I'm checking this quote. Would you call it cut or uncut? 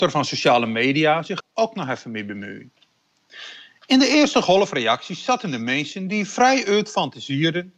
cut